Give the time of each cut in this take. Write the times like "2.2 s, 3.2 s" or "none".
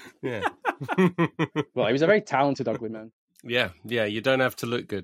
none